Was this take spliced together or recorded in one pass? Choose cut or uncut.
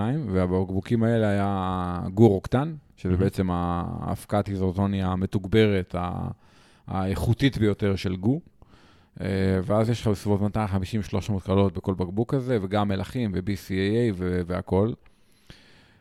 uncut